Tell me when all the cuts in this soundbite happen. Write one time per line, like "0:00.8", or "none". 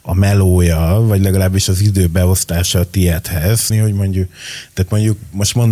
0:03.7